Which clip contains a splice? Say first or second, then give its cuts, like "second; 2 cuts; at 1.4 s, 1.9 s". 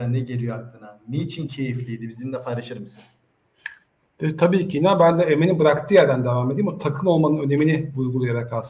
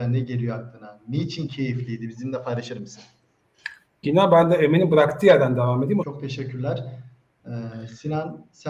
second; 2 cuts; at 4.0 s, 6.0 s